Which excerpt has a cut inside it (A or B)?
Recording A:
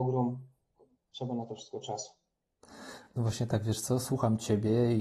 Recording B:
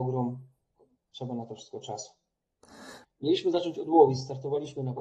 B